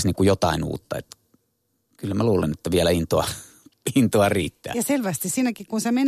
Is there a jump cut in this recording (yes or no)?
no